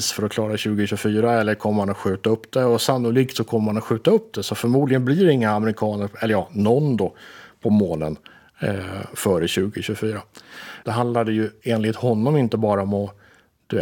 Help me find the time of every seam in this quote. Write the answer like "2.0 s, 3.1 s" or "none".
10.8 s